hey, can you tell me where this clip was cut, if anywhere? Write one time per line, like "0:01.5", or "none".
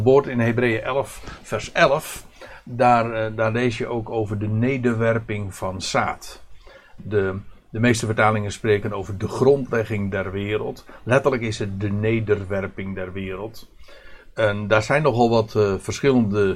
0:07.0